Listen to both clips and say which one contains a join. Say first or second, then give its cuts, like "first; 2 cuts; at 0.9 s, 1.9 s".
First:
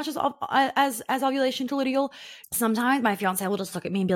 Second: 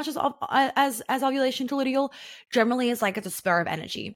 first; 1 cut; at 2.4 s